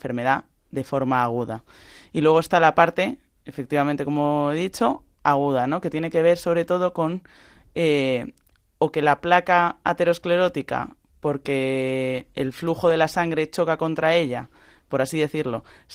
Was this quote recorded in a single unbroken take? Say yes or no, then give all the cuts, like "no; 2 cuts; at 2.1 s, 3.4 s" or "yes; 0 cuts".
yes; 0 cuts